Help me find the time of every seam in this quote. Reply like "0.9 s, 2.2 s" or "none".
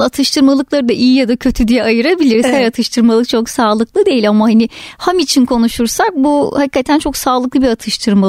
none